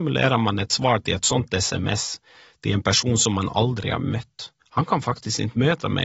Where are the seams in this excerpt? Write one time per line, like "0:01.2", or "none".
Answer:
0:04.6